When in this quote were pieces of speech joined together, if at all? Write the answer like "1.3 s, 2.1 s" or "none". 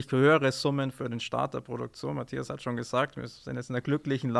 none